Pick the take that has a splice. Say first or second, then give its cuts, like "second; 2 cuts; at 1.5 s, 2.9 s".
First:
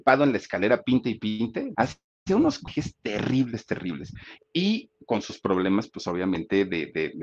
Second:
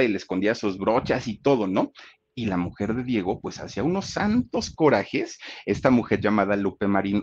first; 2 cuts; at 1.7 s, 4.4 s